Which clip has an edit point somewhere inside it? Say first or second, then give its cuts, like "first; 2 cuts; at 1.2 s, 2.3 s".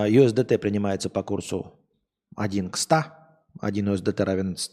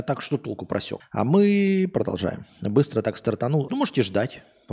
second; 3 cuts; at 1.0 s, 2.5 s, 3.7 s